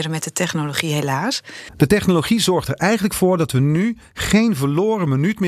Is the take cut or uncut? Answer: uncut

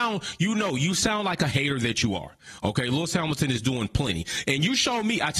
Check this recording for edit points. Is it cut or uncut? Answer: uncut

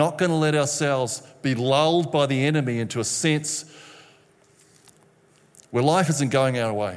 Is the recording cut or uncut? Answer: uncut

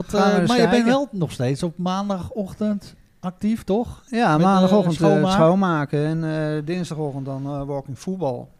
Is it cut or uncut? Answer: uncut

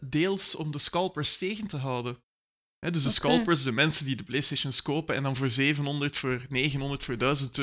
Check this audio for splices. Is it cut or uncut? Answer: uncut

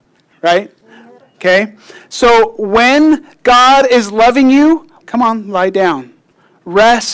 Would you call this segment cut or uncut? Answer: cut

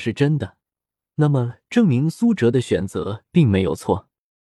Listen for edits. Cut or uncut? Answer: uncut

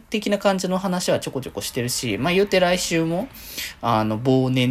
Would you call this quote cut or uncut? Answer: uncut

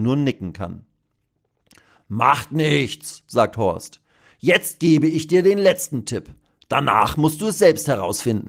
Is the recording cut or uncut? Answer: uncut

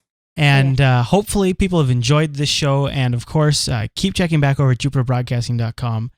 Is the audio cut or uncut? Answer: uncut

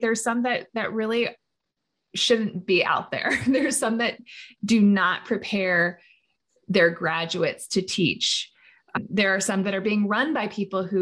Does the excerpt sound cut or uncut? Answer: uncut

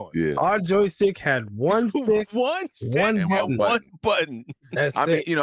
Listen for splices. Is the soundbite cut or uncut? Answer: uncut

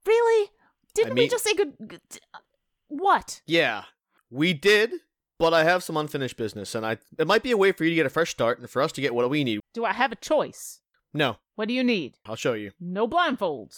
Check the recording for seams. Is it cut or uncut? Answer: cut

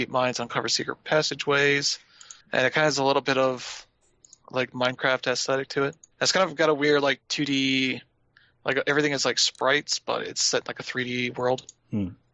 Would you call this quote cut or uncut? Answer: cut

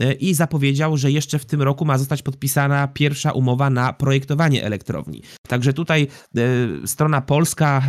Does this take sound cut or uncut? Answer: uncut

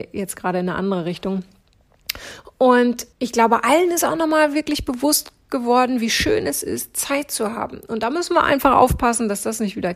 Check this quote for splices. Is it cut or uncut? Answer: cut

